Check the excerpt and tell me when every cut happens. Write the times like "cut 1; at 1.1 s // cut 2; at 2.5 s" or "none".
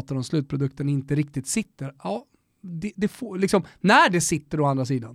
none